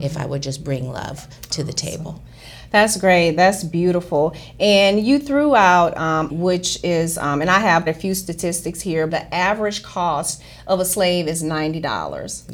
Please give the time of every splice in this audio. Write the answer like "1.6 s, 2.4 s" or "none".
6.3 s, 7.9 s, 9.1 s